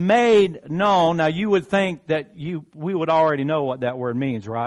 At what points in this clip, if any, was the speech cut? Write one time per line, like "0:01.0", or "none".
none